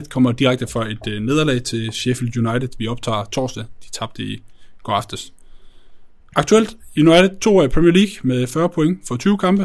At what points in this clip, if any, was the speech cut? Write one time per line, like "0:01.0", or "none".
none

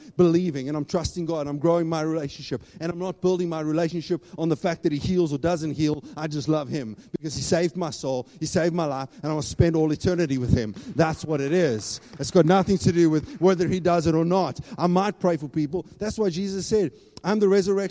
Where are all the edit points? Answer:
none

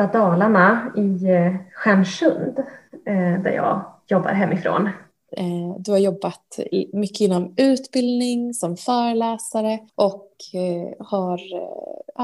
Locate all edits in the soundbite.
0:05.3
0:09.9

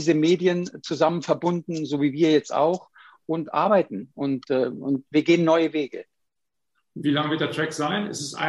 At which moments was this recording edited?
0:04.4

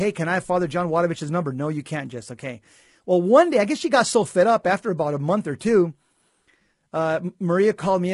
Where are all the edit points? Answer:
none

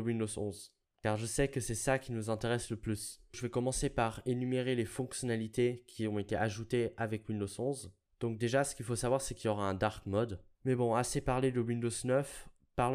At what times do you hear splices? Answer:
0:10.5

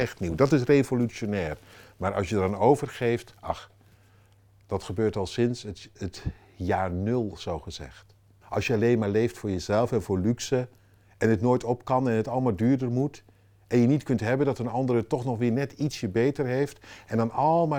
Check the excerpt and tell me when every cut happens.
0:08.4

